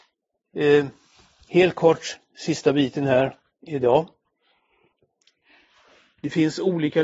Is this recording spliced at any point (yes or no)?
no